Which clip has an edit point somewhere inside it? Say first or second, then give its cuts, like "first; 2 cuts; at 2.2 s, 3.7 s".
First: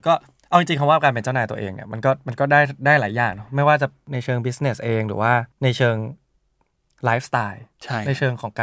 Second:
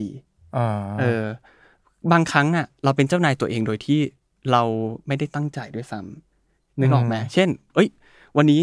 first; 1 cut; at 5.5 s